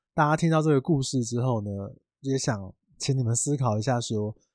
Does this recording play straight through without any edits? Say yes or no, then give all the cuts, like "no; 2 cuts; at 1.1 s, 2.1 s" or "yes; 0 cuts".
yes; 0 cuts